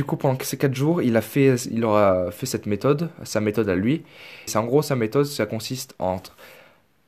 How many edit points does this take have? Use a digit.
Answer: 1